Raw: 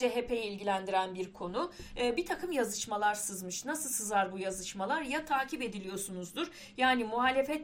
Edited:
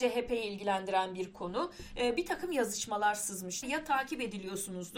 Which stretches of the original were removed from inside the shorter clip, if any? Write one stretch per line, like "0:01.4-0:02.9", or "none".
0:03.6-0:05.0